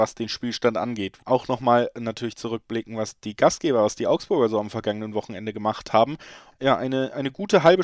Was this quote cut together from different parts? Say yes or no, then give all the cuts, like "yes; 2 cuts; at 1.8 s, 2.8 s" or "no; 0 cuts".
yes; 2 cuts; at 1.2 s, 6.5 s